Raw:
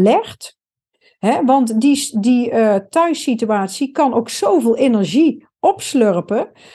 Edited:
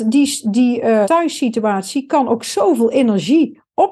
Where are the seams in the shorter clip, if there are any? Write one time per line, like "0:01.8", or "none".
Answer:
0:01.0